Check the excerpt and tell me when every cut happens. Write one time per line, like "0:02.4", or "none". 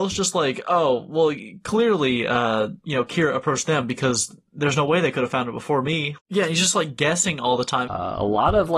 0:06.2
0:07.9

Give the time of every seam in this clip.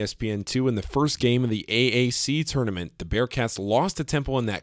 none

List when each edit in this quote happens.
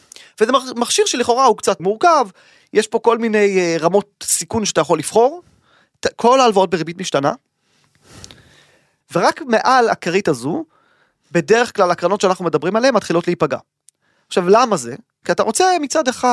0:01.8
0:09.0

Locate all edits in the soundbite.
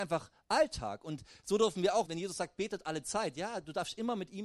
0:02.0

